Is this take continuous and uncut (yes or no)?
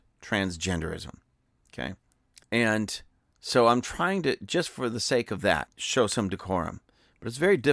yes